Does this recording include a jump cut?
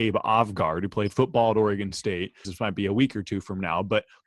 yes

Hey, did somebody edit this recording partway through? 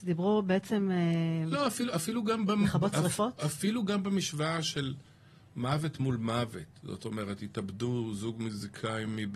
no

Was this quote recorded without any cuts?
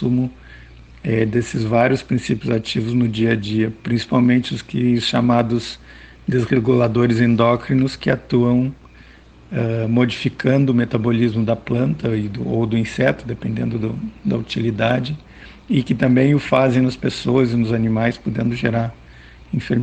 yes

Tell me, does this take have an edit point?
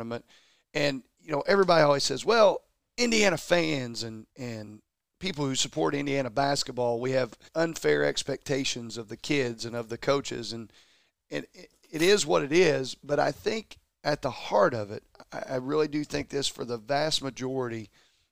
yes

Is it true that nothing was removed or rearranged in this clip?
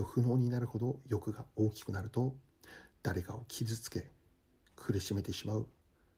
yes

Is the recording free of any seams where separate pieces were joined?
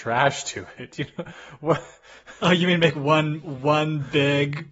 yes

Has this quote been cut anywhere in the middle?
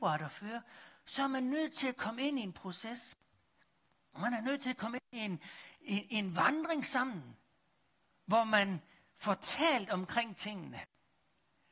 no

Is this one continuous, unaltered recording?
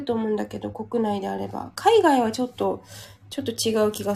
yes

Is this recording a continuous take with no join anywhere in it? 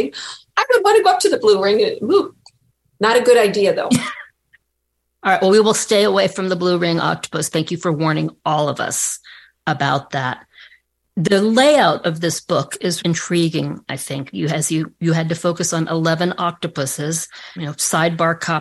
no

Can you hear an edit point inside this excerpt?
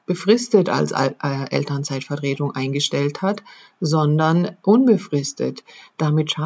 no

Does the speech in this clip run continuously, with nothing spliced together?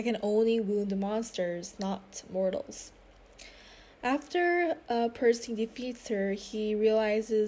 yes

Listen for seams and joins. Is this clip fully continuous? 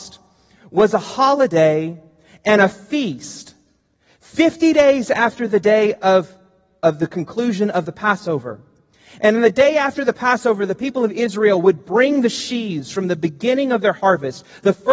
yes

